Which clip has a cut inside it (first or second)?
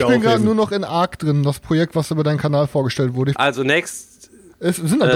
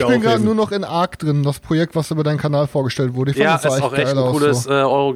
first